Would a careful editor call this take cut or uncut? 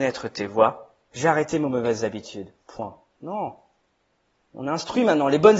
cut